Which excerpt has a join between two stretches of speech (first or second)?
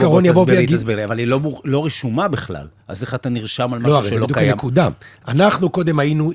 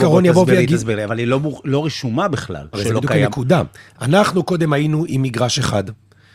second